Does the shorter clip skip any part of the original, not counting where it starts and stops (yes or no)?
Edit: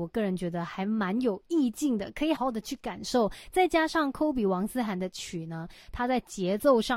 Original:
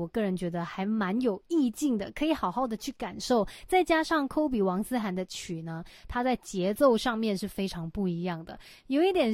yes